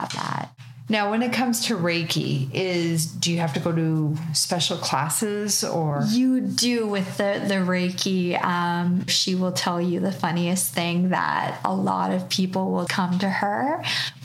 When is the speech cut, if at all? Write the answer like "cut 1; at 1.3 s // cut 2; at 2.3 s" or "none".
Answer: cut 1; at 9.1 s // cut 2; at 12.9 s